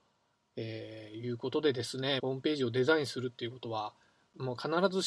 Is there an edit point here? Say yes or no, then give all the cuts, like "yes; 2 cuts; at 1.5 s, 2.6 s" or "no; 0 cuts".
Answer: yes; 1 cut; at 2.2 s